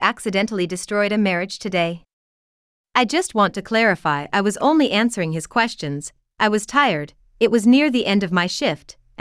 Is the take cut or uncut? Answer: uncut